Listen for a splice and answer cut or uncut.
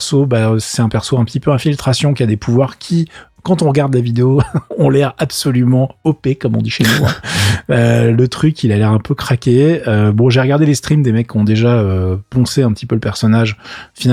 uncut